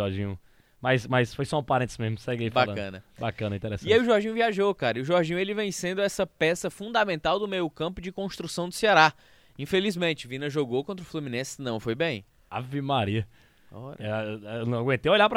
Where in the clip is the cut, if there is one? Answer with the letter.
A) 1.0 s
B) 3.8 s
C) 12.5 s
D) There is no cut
C